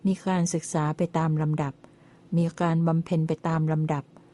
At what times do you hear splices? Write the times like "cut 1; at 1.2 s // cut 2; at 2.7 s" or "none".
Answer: none